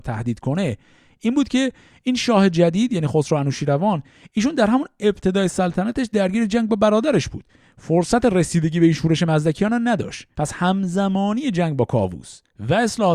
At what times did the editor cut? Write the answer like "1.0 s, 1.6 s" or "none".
10.3 s